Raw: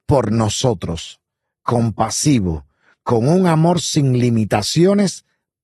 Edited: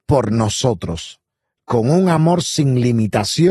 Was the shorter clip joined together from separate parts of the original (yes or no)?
yes